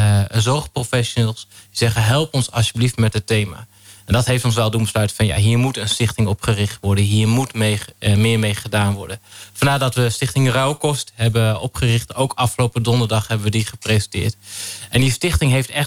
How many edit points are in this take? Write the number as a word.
zero